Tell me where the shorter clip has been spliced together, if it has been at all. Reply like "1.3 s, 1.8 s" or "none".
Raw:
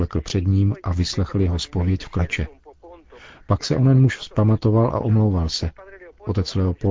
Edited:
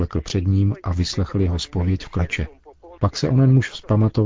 3.0 s